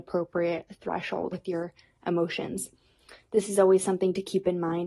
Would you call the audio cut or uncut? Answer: cut